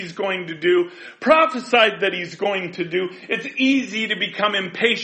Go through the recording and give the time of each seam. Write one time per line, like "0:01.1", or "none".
none